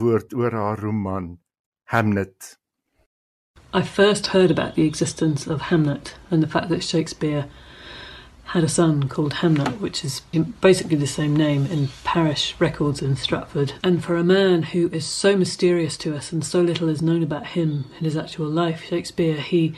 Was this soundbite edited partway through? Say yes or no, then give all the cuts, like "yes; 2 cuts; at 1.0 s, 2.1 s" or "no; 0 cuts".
yes; 2 cuts; at 10.3 s, 13.8 s